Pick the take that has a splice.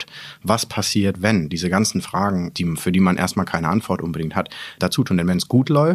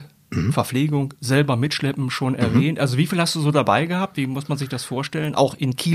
first; 2 cuts; at 2.5 s, 4.8 s

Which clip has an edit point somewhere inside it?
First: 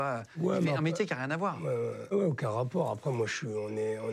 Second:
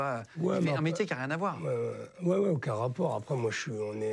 first; 1 cut; at 2.1 s

